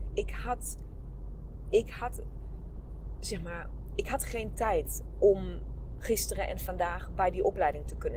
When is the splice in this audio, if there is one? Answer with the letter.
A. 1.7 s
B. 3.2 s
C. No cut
C